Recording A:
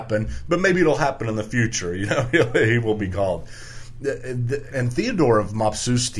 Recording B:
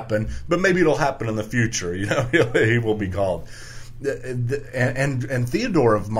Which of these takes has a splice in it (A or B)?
A